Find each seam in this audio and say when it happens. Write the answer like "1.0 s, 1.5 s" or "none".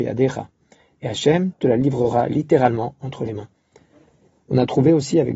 1.5 s